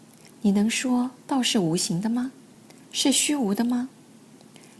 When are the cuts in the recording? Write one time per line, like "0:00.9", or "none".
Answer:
none

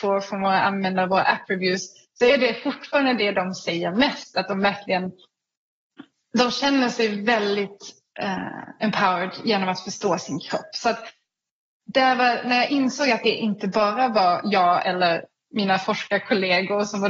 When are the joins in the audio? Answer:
none

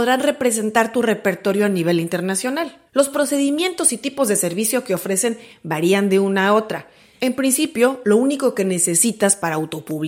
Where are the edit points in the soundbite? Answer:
0:02.9
0:07.2

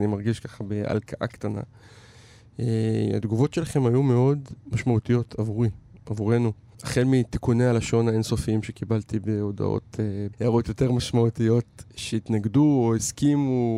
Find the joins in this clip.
0:06.7
0:10.3

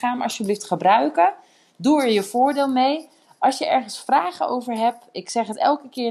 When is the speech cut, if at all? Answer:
none

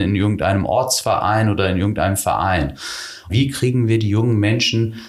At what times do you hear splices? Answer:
0:03.3

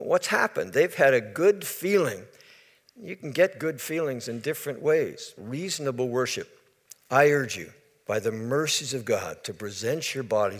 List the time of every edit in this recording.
0:05.4
0:06.9

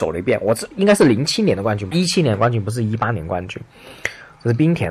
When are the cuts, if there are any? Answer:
0:01.9

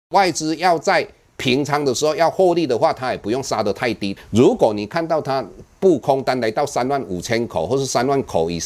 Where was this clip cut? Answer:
0:04.2

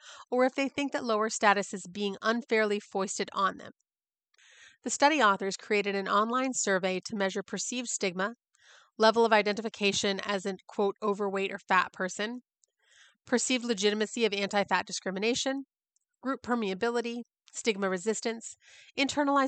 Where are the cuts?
none

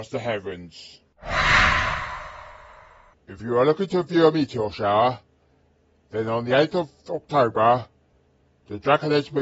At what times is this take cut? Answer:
none

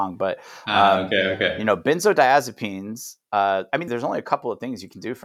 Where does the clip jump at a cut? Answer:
0:03.9

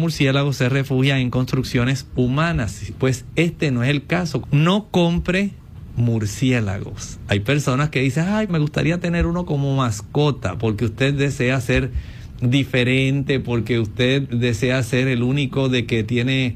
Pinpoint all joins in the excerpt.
0:02.9
0:04.4
0:08.5

